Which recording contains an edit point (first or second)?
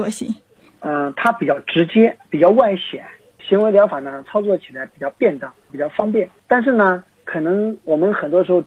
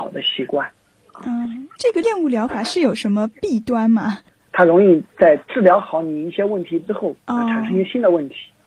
second